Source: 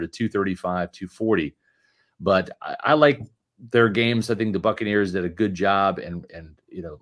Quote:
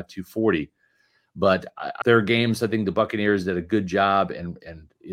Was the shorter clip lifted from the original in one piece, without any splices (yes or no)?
no